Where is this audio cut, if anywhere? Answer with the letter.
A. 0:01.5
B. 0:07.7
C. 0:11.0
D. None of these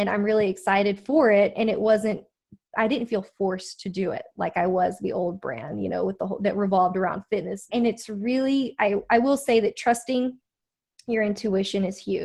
B